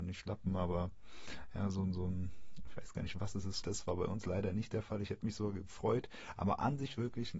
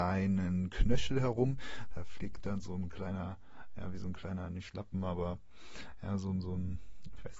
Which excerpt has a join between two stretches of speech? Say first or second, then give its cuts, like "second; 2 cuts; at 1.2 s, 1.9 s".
first; 1 cut; at 3.6 s